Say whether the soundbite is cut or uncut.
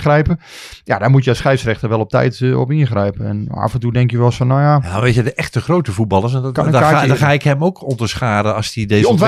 uncut